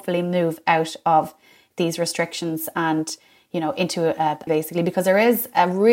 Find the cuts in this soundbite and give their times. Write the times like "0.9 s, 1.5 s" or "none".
4.5 s